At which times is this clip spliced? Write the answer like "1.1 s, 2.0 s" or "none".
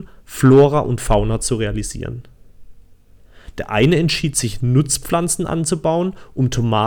none